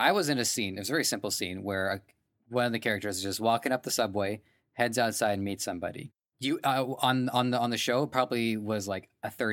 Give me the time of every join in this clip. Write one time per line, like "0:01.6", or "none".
none